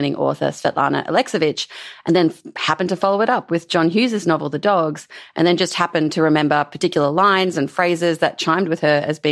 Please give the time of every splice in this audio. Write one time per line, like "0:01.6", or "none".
none